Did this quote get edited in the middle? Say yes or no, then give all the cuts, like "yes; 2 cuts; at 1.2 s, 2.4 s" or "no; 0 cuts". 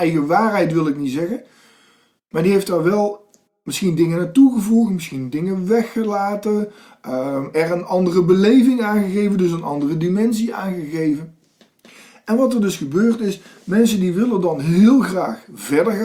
no; 0 cuts